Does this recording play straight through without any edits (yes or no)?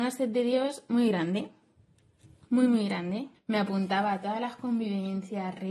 no